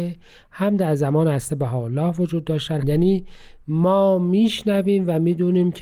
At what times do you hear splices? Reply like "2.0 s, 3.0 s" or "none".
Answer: 2.8 s